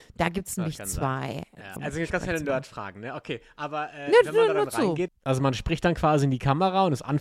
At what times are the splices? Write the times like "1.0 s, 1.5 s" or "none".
1.8 s, 5.1 s